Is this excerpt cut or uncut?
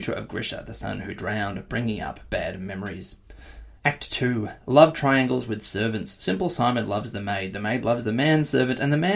cut